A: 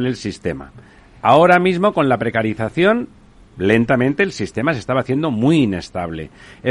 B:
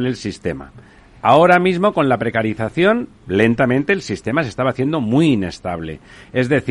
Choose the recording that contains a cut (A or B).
B